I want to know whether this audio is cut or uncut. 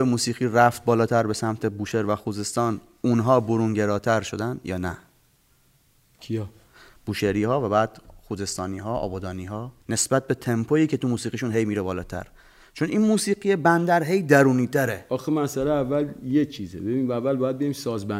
cut